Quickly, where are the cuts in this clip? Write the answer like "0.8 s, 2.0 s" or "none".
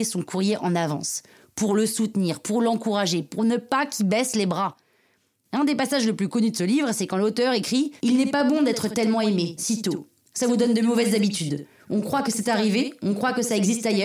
8.0 s, 9.6 s